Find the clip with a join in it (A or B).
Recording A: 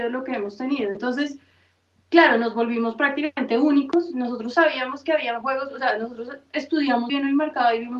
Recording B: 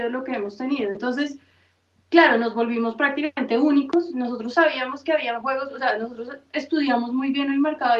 A